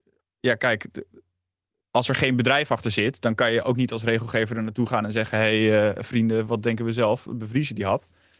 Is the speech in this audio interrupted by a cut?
no; 0 cuts

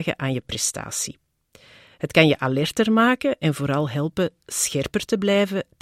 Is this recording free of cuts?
yes; 0 cuts

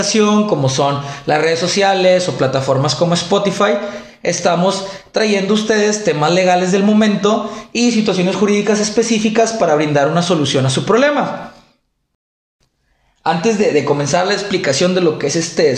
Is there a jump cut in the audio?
no; 0 cuts

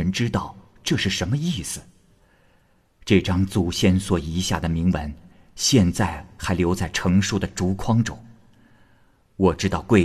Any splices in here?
no; 0 cuts

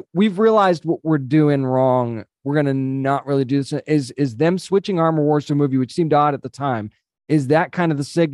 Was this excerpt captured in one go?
yes; 0 cuts

